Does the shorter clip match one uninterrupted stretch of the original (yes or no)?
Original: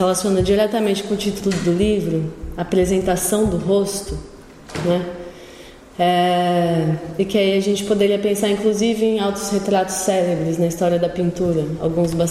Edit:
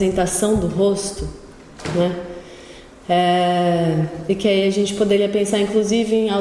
yes